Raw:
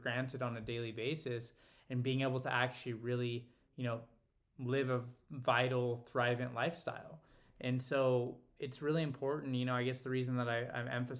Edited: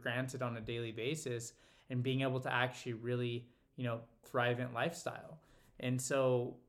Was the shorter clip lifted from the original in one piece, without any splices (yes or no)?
no